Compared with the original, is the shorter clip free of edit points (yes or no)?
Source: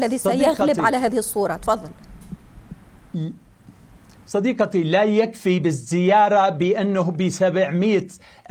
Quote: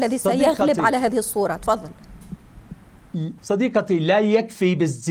no